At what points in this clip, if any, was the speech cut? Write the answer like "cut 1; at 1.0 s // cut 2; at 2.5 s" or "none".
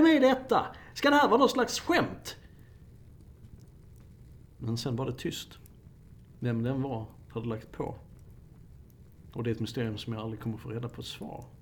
cut 1; at 0.9 s